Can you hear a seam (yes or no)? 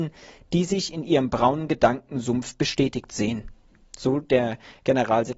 no